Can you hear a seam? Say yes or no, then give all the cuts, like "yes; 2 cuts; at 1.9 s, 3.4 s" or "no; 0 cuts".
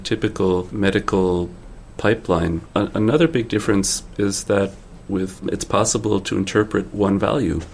yes; 1 cut; at 5.4 s